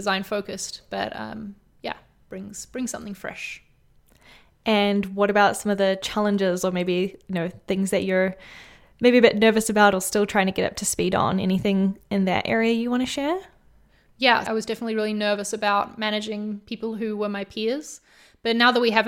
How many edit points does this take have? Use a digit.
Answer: 1